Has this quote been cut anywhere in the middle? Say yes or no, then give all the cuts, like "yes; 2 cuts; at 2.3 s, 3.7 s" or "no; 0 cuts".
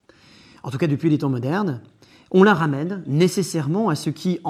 no; 0 cuts